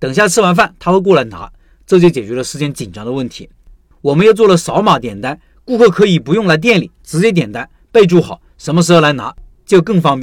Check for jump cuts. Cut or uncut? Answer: cut